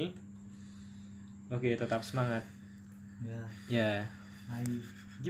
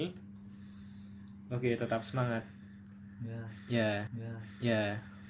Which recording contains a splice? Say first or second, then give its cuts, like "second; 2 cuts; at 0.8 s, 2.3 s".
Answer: second; 1 cut; at 4.1 s